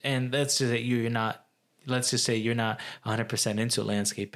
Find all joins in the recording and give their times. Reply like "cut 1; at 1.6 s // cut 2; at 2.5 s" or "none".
none